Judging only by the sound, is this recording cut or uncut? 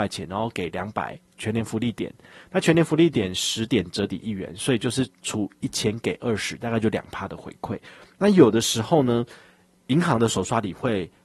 cut